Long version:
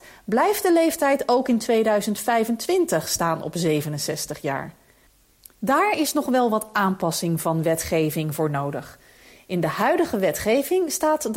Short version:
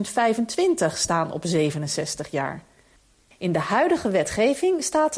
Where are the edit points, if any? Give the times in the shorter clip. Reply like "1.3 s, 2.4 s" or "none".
3.3 s